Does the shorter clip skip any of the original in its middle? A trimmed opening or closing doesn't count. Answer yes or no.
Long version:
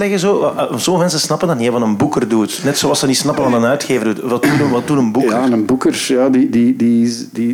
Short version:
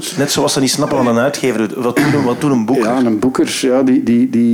no